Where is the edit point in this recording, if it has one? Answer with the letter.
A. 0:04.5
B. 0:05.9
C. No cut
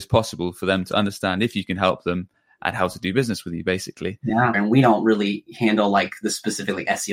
A